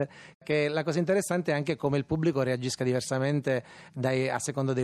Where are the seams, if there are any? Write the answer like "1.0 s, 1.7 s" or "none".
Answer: none